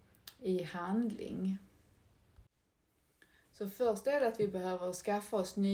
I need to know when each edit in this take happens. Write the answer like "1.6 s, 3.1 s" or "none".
none

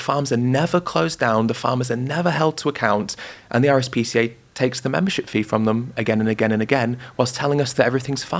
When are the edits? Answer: none

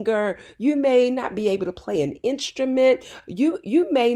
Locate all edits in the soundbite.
none

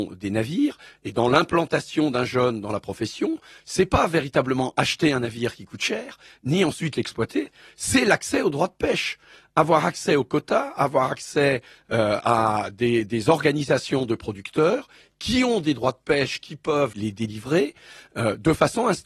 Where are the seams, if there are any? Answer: none

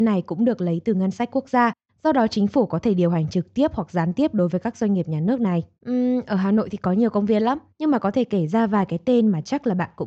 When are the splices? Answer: 5.8 s

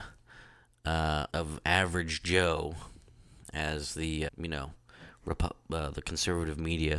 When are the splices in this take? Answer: 1.3 s, 4.3 s

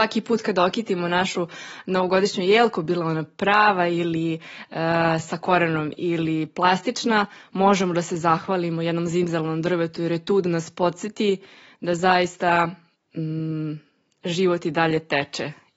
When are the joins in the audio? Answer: none

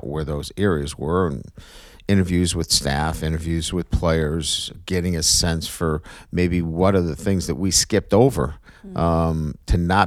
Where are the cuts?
none

